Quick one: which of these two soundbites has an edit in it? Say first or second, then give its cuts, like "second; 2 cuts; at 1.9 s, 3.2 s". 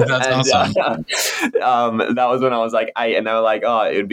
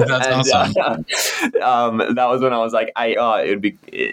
second; 1 cut; at 3.1 s